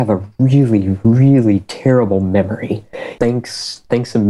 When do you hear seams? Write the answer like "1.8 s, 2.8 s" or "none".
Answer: 3.2 s